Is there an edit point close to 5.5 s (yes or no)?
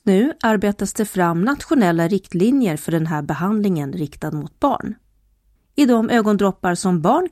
yes